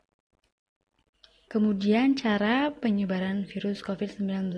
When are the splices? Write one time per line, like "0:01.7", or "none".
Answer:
0:01.5